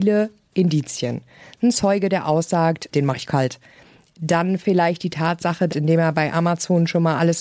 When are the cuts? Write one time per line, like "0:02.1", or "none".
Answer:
0:02.9
0:05.7

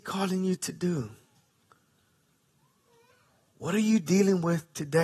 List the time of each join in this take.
0:03.5

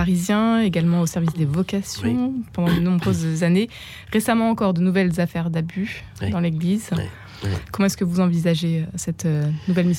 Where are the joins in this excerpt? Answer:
none

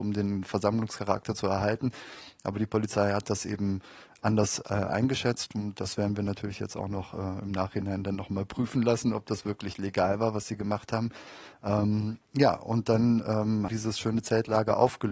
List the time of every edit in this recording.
0:13.7

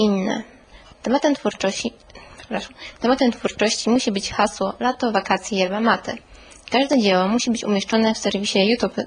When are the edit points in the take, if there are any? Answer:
0:00.9

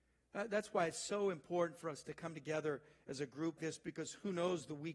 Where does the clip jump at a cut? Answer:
0:03.6

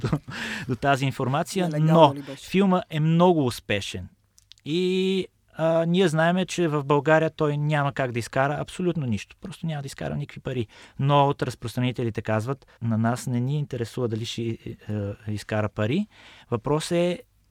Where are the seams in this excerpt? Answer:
0:12.8

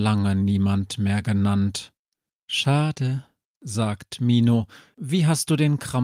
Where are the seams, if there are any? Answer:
0:02.3
0:04.9

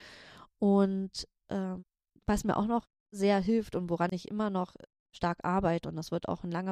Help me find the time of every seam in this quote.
none

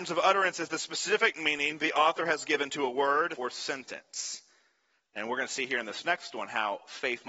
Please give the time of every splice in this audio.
0:03.4
0:05.0

